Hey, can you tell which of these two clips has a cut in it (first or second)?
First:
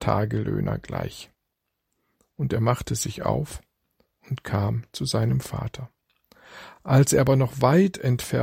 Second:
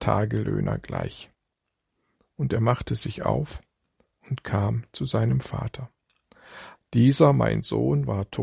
second